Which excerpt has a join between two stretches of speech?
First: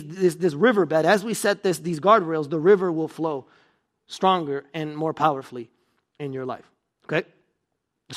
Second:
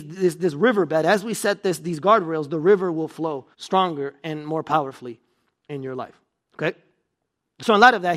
second; 1 cut; at 3.5 s

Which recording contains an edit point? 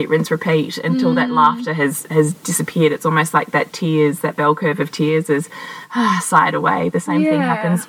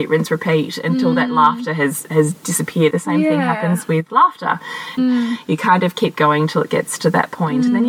second; 2 cuts; at 2.9 s, 5.0 s

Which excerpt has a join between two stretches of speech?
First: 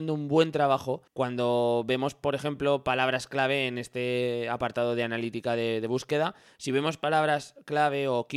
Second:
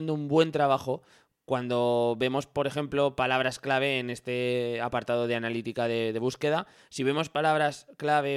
first; 1 cut; at 1.1 s

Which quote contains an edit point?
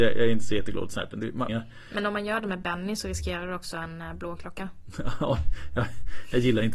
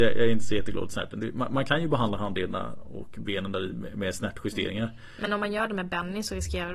first; 1 cut; at 1.5 s

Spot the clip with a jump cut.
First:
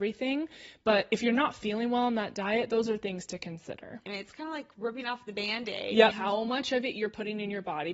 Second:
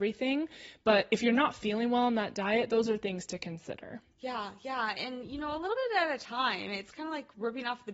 first; 2 cuts; at 4.1 s, 6.1 s

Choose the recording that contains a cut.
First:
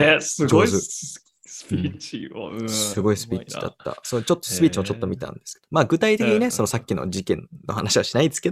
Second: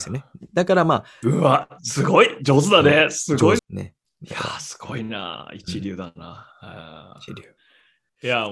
second; 1 cut; at 3.6 s

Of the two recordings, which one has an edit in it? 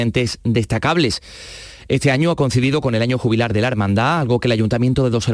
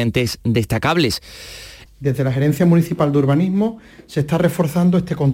second; 1 cut; at 1.9 s

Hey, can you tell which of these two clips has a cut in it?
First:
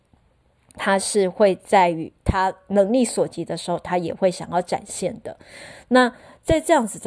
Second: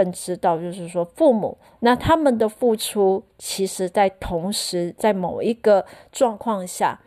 second; 1 cut; at 1.8 s

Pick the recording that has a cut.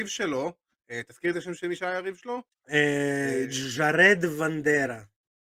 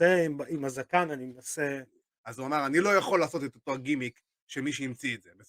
second; 1 cut; at 2.1 s

